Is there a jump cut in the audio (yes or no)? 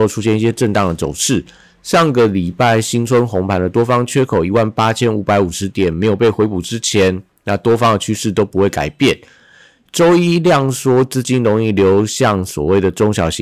no